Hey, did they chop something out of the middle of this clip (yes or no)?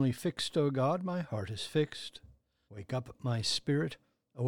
yes